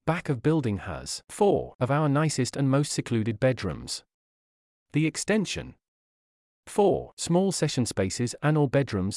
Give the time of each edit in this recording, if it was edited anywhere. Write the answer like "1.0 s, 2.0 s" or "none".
none

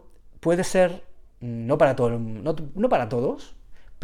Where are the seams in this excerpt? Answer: 1.3 s

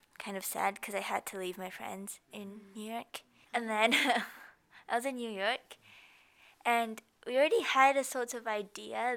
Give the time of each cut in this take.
3.4 s

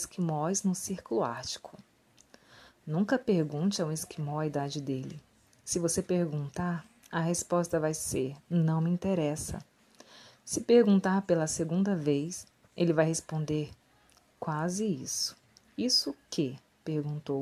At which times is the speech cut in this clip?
8.4 s

